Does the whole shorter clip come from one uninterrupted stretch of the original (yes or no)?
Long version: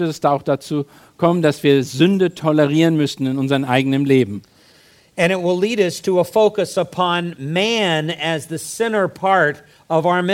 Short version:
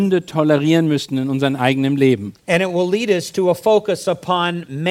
no